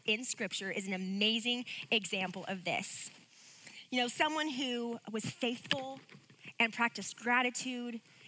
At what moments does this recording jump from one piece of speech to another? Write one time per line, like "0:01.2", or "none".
none